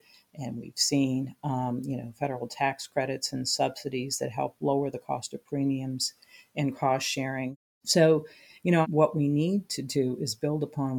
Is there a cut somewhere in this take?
yes; 1 cut; at 8.8 s

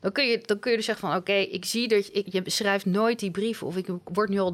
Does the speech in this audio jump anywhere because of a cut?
yes; 1 cut; at 2.3 s

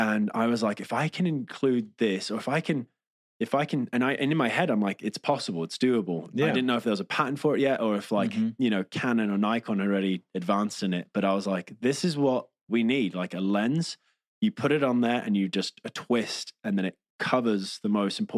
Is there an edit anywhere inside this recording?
no; 0 cuts

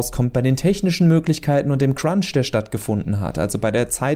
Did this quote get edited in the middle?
no; 0 cuts

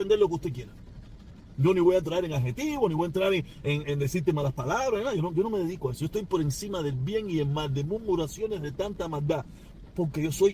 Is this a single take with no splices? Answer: no; 1 cut; at 3.8 s

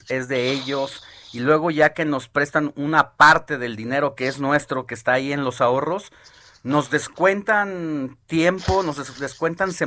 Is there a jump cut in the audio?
no; 0 cuts

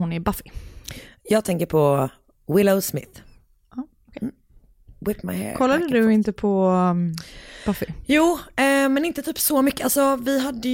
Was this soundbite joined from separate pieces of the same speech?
no; 0 cuts

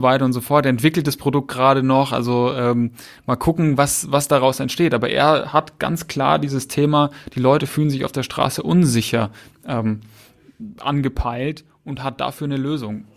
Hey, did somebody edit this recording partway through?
no; 0 cuts

